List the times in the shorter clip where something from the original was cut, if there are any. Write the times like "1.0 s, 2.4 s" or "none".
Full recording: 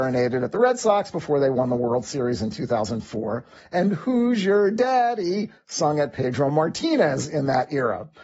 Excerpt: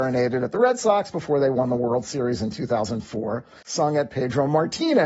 3.6 s